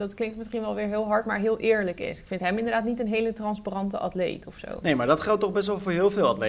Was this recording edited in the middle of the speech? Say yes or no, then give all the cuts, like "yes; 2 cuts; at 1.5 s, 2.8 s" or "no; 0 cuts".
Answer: no; 0 cuts